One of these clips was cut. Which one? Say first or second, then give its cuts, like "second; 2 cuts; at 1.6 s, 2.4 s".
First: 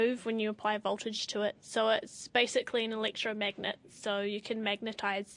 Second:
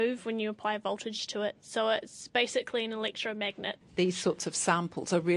second; 1 cut; at 3.8 s